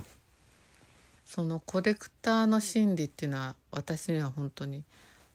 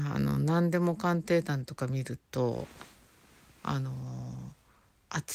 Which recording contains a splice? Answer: first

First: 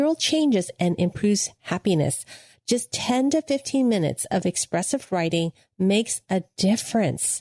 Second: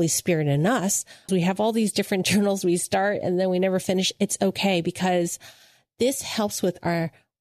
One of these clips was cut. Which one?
second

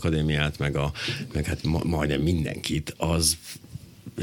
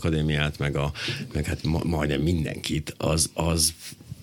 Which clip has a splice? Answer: first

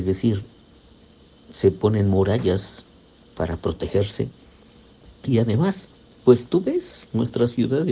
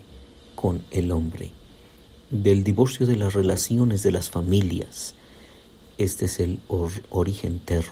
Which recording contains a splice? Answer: first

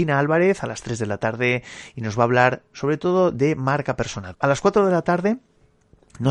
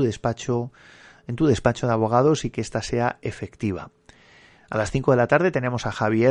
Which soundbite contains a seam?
first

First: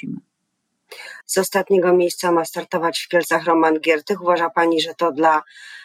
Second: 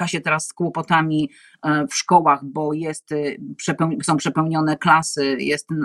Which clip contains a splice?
first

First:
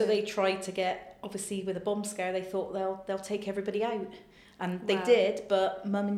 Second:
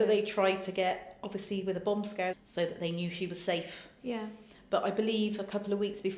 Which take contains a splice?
second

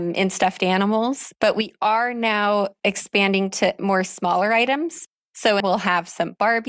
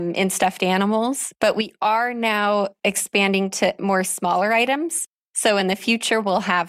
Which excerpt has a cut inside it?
first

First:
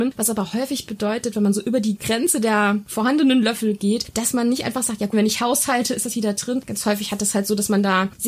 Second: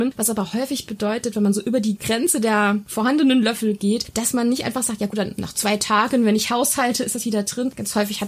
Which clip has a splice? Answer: first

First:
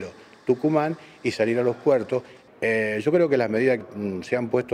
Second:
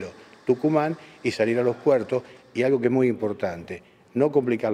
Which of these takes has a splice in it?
first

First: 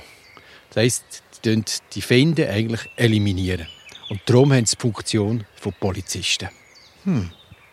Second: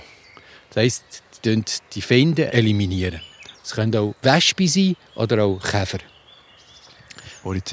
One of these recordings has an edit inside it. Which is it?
second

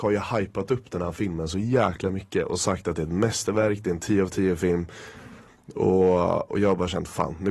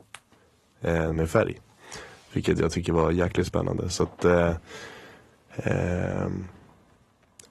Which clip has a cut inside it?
second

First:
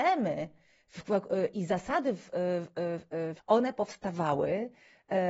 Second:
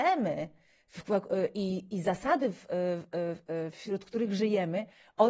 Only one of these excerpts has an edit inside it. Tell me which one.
first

